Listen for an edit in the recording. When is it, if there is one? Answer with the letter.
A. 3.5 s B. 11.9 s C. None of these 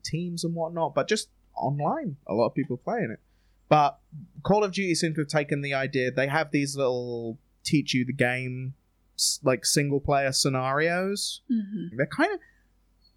B